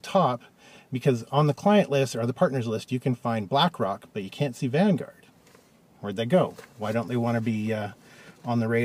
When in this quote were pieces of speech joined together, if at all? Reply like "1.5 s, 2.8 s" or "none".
none